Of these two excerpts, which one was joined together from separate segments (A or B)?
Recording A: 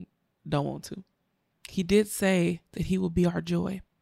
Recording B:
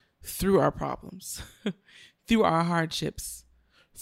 A